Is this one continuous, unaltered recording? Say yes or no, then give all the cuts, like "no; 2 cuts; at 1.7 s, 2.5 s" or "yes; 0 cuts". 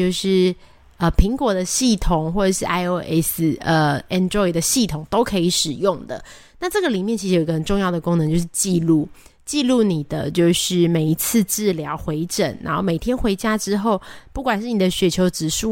yes; 0 cuts